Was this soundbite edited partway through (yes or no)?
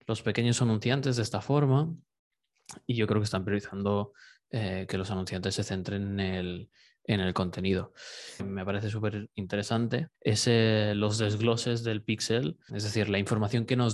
yes